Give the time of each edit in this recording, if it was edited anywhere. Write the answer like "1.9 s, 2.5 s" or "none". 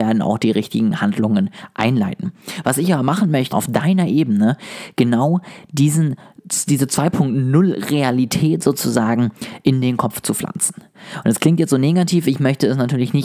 3.5 s